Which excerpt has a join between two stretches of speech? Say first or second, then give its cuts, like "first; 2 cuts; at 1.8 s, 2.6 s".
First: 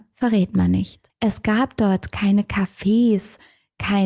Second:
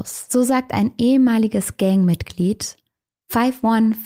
first; 1 cut; at 1.1 s